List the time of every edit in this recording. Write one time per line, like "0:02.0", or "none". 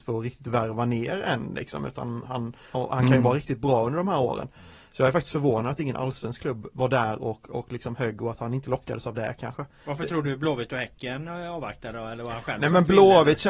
0:02.7